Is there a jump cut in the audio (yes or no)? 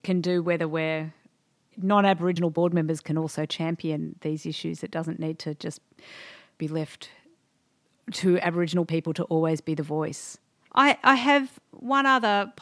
no